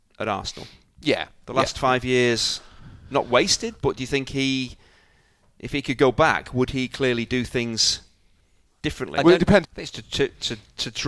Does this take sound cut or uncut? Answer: cut